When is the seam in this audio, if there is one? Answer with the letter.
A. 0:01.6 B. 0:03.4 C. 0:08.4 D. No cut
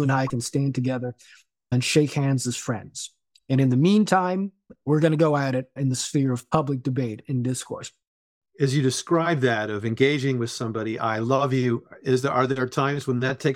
D